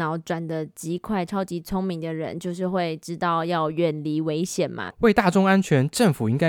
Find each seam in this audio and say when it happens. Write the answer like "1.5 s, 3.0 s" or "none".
4.9 s